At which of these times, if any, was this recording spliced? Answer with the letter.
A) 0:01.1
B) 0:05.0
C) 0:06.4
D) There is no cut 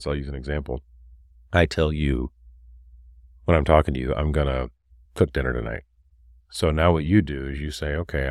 B